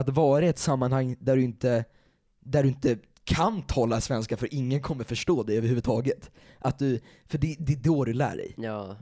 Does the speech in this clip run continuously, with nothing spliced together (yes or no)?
yes